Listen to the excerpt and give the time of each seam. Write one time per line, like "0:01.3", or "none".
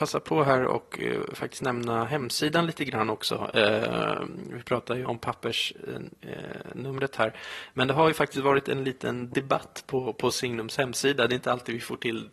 0:05.0